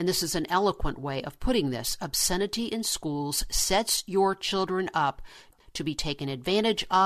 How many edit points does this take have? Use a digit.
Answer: 0